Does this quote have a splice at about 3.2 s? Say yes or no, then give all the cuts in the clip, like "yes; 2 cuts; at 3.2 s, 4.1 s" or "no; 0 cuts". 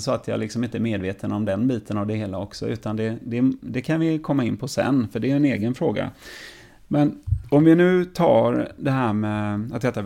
no; 0 cuts